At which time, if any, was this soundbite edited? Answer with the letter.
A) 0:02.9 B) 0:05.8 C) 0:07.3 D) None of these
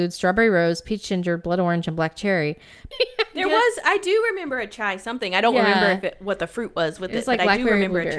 A